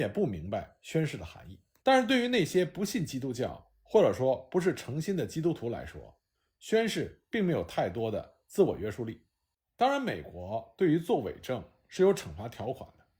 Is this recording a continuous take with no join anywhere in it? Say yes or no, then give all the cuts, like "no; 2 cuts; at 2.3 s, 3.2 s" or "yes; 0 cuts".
no; 1 cut; at 1.8 s